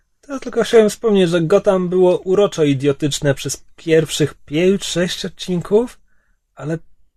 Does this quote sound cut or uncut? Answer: uncut